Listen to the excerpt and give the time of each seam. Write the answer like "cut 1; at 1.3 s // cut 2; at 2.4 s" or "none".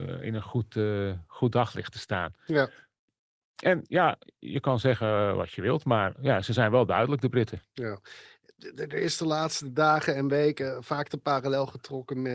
none